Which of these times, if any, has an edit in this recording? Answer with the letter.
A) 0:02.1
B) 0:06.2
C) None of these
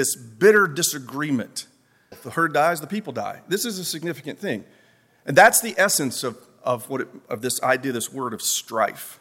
A